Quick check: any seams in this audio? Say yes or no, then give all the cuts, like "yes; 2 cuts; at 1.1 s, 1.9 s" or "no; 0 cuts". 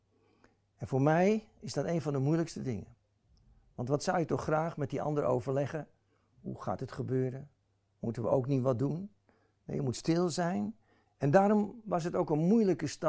yes; 1 cut; at 11.1 s